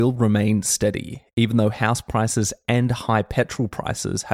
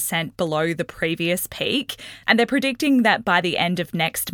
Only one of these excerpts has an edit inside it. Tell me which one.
second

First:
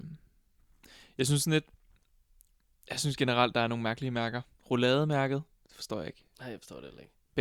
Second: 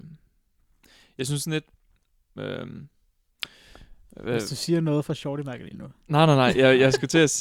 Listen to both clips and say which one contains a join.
second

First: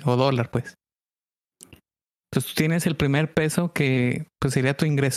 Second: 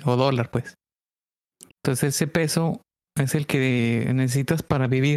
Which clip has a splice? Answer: second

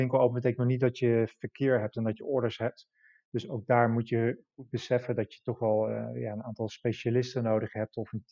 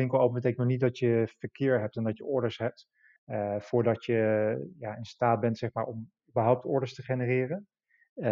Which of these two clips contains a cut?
second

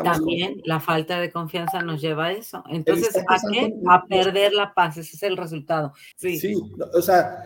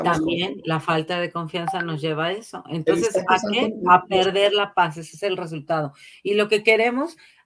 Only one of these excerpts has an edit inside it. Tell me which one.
first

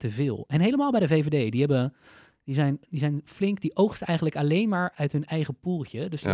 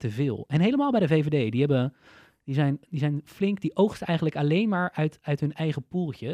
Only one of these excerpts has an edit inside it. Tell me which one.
first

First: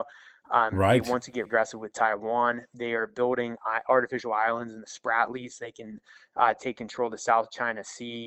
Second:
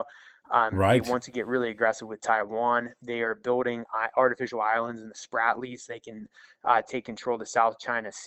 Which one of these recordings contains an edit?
first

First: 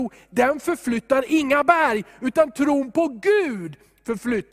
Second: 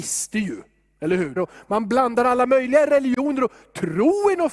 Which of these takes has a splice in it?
second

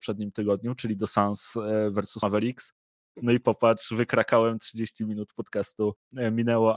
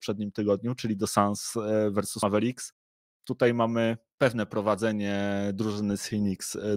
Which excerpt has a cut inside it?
first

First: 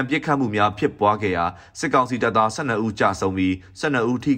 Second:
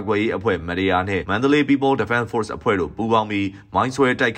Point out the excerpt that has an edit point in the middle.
second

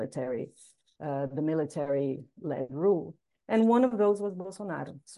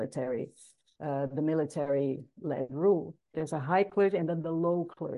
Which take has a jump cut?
second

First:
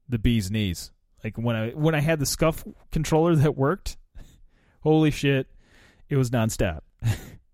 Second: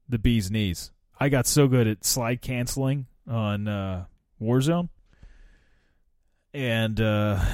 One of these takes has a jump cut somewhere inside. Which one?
second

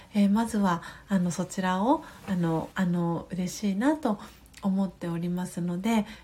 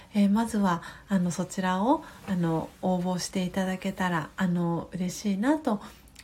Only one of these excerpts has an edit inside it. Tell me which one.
first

